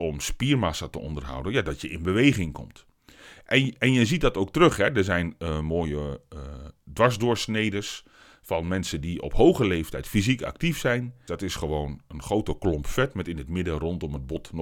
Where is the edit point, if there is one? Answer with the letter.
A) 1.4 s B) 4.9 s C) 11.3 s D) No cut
C